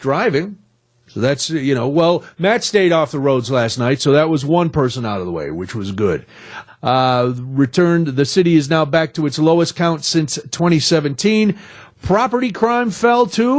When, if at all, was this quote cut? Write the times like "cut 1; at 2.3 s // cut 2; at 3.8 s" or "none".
cut 1; at 6.7 s